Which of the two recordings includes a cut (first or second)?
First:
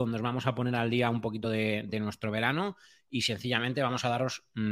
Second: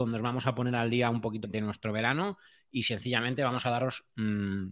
second